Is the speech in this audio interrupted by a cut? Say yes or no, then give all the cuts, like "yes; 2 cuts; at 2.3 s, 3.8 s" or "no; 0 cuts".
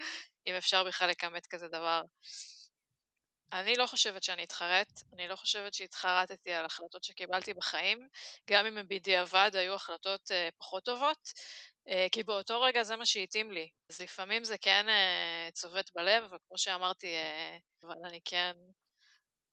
yes; 3 cuts; at 3.5 s, 13.9 s, 17.8 s